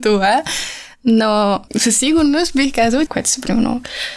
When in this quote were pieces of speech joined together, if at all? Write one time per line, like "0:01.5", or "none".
0:01.7
0:03.1